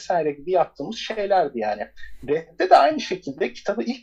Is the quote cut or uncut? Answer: uncut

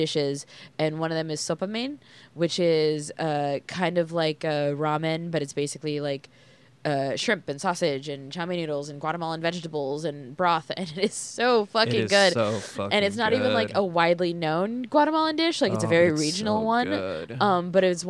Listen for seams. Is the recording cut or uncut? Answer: uncut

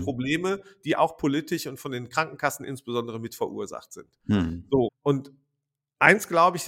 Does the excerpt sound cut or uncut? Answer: cut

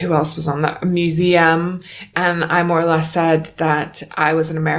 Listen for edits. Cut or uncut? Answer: cut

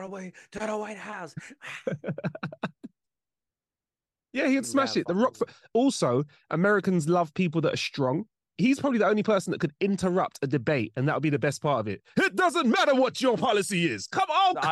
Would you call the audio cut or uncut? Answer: cut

